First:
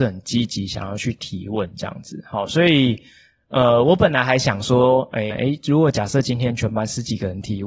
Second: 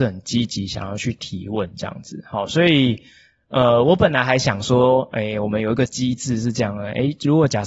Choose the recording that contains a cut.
first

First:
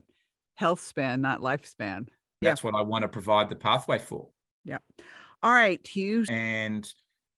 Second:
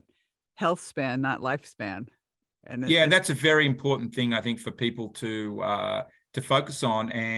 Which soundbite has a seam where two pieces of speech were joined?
first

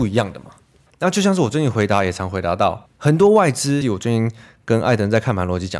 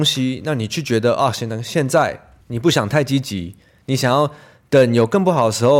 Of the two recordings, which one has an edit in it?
first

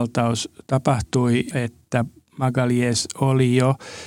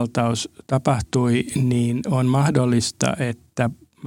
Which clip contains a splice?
first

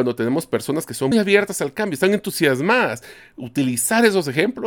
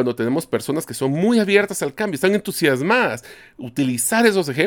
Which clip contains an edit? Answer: first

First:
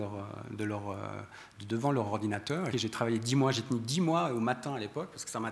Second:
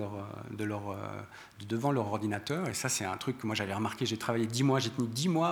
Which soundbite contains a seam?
first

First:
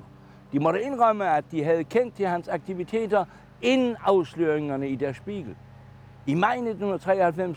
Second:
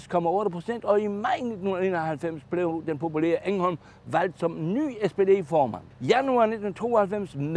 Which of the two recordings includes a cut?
second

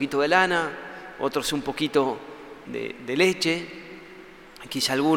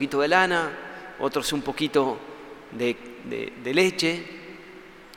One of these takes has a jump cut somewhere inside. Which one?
first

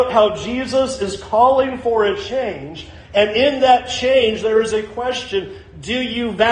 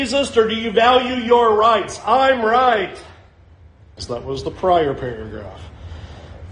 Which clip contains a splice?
second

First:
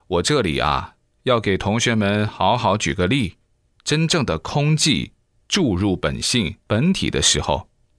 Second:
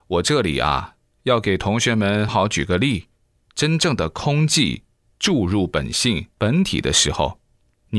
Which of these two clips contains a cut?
second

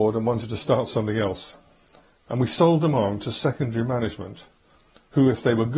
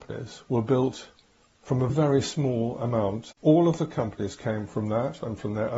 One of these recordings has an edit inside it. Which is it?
second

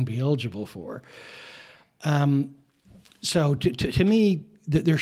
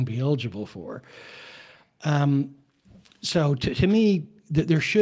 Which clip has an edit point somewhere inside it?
second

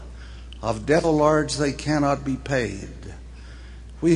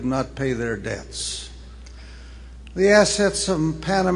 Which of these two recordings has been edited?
first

